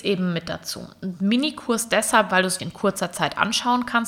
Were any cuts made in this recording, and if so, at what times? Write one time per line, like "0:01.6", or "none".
0:02.6